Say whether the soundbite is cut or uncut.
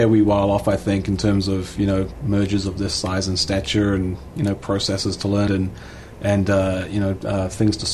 cut